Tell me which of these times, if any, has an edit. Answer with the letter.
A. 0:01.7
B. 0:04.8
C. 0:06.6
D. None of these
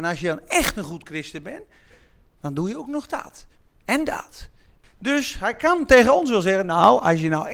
B